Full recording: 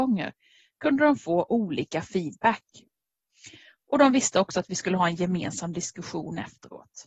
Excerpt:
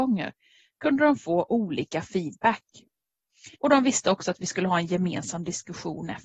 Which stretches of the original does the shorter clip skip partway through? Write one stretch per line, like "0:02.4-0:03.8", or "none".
0:03.5-0:03.8